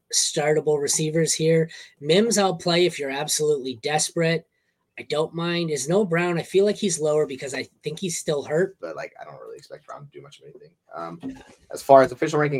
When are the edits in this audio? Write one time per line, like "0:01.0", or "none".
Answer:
0:08.8
0:10.9